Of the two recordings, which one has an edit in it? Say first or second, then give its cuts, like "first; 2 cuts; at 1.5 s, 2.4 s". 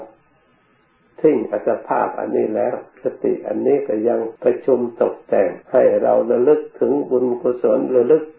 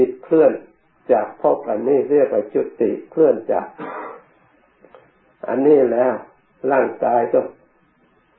first; 2 cuts; at 4.4 s, 5.6 s